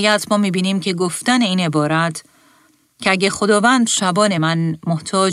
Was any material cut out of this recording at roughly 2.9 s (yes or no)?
no